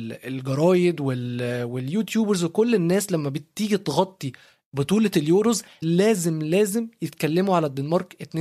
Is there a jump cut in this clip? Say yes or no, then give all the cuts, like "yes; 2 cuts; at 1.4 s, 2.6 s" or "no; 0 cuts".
yes; 1 cut; at 5.8 s